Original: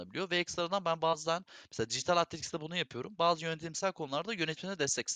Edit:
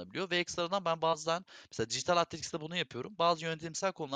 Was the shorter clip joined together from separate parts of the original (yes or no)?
no